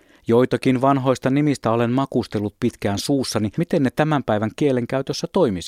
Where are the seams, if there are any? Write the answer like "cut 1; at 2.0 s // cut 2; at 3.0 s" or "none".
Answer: cut 1; at 3.5 s